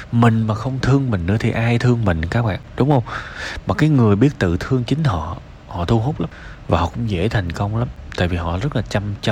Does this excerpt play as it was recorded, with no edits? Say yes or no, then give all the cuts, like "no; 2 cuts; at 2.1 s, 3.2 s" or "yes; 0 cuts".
yes; 0 cuts